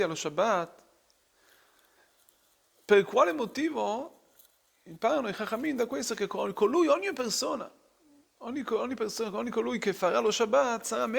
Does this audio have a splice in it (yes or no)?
no